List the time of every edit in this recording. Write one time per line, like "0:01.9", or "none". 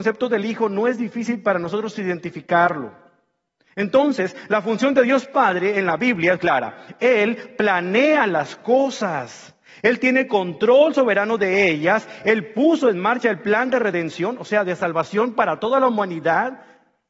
0:06.4